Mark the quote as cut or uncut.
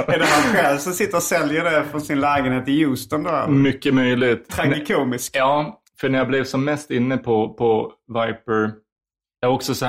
cut